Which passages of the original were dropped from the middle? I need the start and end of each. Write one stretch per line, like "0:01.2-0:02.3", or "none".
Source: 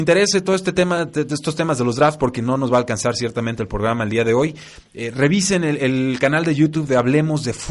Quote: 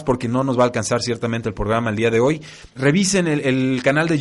0:04.9-0:05.1